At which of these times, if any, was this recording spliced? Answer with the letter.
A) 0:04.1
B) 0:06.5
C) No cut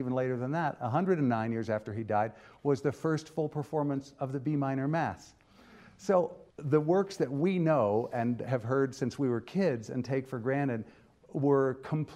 B